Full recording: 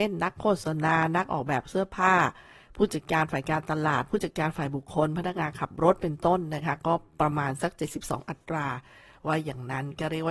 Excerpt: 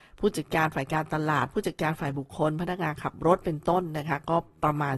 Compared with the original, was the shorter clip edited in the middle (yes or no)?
no